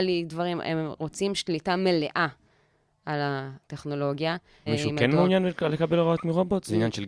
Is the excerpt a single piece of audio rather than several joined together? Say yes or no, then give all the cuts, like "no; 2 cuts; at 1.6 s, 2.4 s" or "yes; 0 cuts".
no; 1 cut; at 4.7 s